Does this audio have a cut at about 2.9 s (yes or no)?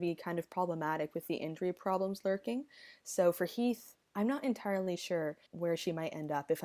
no